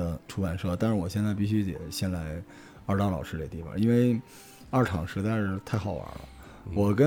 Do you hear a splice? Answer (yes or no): no